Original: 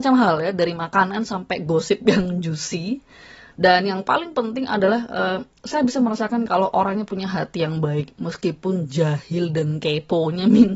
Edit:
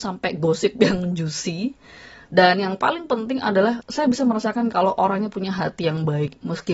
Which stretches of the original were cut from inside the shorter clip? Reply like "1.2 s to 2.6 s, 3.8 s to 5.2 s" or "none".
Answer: 5.1 s to 5.6 s